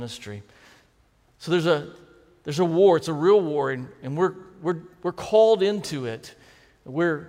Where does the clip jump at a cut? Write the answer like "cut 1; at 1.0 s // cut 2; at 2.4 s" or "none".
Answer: none